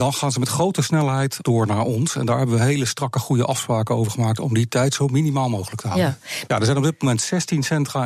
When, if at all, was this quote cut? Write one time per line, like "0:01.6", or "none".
0:01.4
0:06.5